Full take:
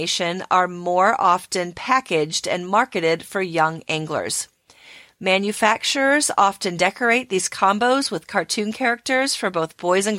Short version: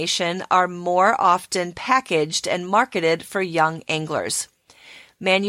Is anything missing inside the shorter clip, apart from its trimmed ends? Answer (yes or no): no